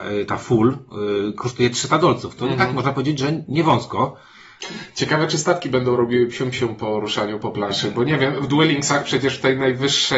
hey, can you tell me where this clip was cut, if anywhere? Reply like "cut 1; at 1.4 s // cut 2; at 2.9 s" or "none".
none